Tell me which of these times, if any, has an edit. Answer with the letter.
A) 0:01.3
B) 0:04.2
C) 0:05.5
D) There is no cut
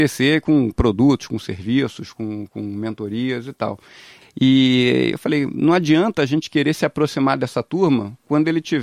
B